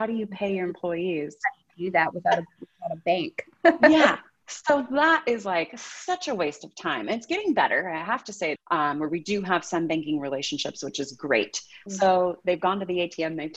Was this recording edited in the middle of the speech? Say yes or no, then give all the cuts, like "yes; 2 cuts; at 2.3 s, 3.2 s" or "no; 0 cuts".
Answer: yes; 2 cuts; at 8.5 s, 11.9 s